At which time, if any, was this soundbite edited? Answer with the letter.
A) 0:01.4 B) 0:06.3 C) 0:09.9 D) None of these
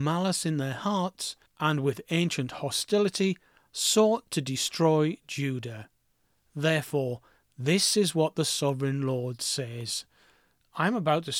A